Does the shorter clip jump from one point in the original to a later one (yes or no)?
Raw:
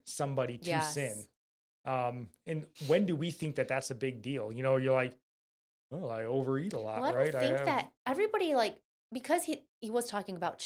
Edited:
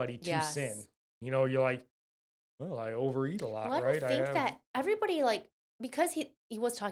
yes